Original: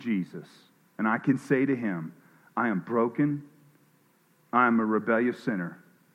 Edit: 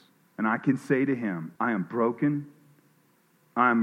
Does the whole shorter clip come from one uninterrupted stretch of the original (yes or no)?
no